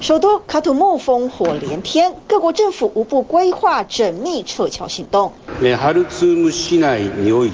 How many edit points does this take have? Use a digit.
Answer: 0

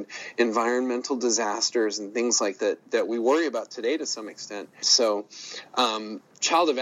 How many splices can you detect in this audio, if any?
2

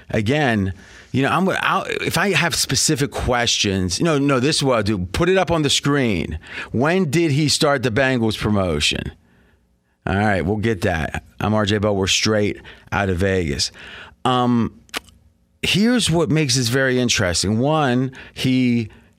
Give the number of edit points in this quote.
0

